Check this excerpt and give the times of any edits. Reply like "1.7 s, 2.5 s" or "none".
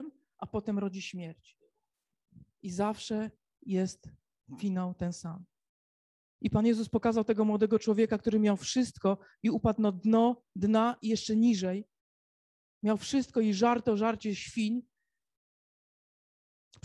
none

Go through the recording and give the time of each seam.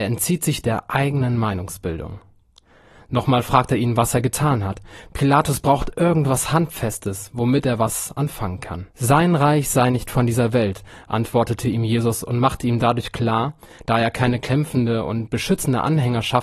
8.9 s, 13.8 s

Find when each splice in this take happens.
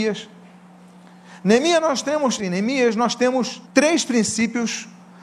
2.4 s, 3.6 s

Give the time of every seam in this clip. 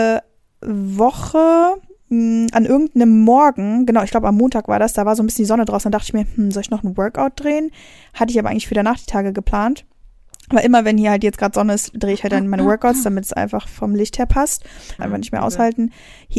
15.0 s

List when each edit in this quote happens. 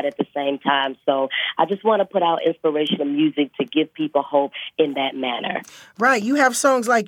none

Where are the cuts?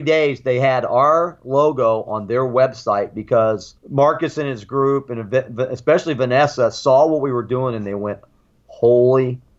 3.8 s

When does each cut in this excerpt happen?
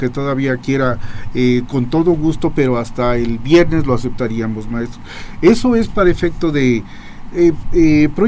1.7 s, 7.3 s

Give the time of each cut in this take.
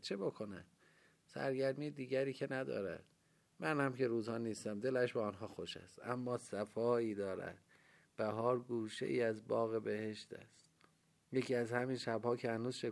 none

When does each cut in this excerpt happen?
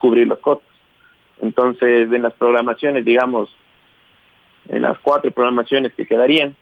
none

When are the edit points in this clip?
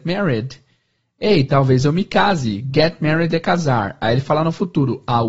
none

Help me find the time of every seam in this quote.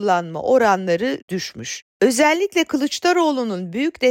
1.9 s

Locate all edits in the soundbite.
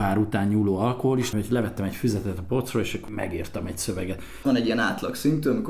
1.3 s, 4.4 s

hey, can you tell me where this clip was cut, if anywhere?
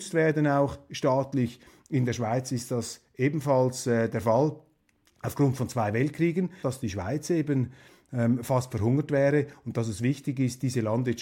6.6 s

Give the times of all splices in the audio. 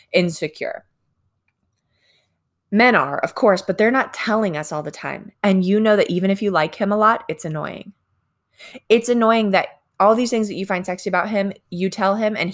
5.3 s

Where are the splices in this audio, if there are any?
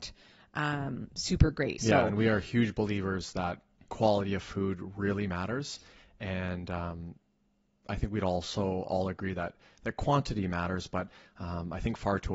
1.8 s

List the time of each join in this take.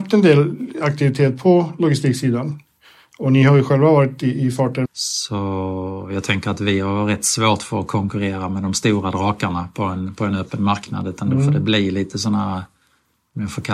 4.8 s

